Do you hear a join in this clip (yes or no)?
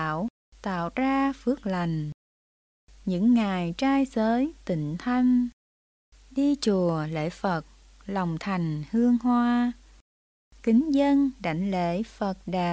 no